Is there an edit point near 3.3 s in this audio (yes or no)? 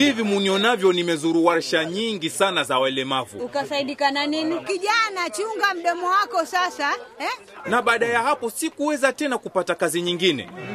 no